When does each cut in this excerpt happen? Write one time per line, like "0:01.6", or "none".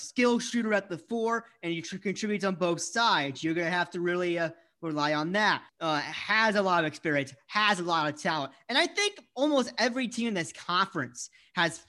0:05.7

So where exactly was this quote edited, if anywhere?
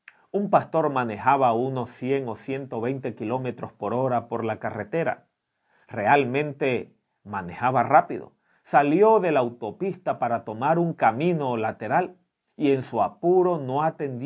none

